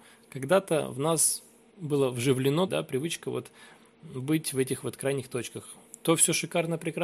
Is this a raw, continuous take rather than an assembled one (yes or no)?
no